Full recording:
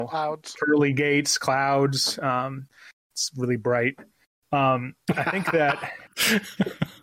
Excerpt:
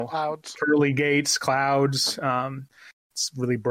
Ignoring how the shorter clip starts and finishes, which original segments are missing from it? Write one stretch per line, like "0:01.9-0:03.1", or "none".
none